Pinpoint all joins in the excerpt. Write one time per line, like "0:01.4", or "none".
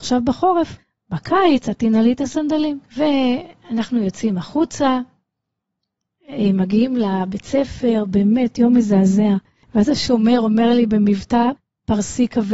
0:02.9

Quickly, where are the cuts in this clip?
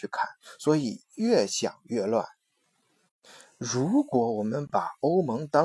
none

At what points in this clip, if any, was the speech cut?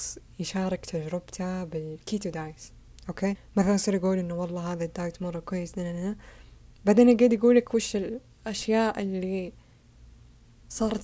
0:03.4

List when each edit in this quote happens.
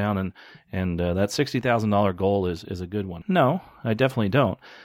0:03.2

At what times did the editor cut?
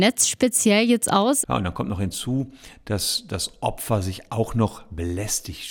0:01.4

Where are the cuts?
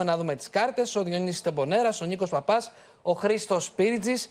none

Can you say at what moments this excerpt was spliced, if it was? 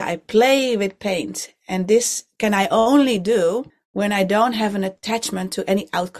none

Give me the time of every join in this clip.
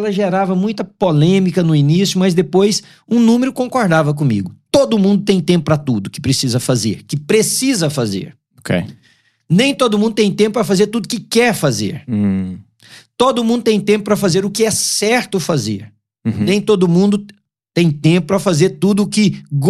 none

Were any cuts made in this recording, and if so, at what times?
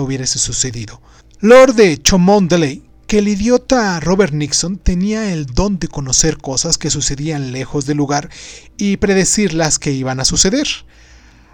0:01.2

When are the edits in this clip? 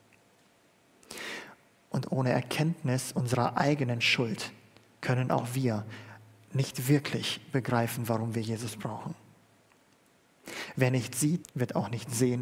0:11.4

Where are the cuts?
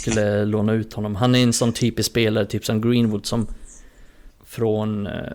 0:04.3

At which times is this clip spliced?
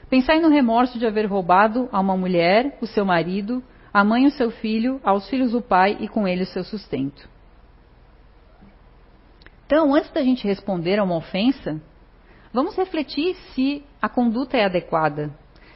none

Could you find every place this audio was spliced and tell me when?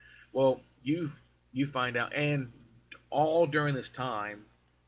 none

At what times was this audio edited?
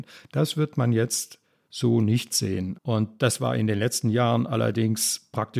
0:02.7

